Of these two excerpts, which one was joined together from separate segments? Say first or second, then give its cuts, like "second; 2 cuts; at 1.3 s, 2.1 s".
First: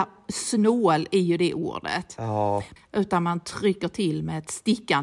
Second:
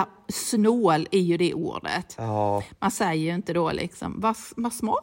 first; 1 cut; at 2.8 s